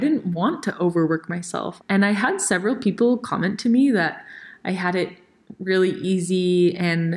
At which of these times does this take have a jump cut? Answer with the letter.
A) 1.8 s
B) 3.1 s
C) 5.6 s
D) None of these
A